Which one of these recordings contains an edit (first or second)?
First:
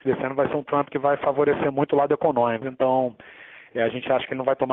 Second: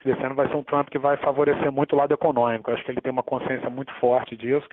first